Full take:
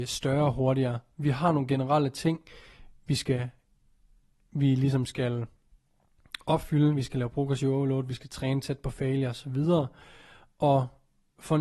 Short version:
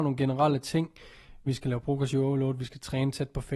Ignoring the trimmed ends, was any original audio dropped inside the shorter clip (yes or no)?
yes